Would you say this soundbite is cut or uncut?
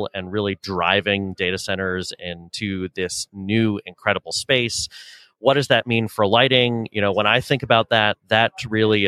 uncut